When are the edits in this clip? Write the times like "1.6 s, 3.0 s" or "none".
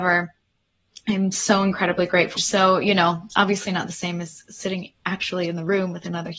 2.4 s